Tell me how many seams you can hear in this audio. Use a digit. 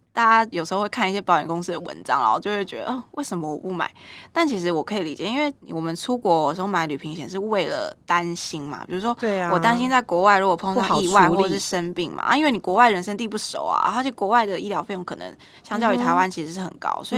1